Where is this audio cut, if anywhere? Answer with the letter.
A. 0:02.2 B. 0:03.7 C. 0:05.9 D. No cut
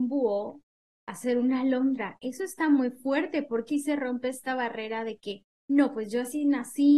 B